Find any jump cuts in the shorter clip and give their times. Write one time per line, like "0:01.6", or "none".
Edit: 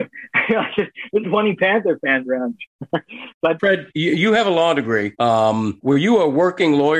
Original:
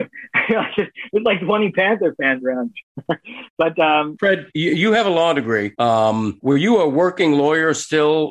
0:01.2
0:03.6

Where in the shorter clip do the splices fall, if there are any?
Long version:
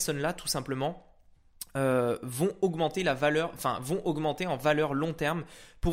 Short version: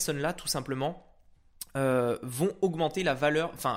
none

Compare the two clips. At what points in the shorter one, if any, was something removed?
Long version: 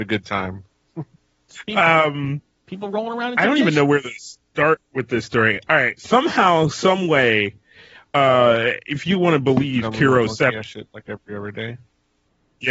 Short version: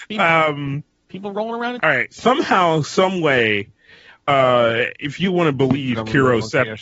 0:01.8

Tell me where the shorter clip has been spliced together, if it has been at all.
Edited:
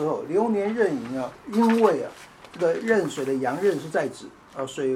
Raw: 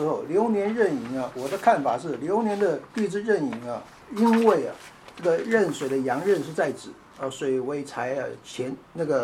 0:01.3

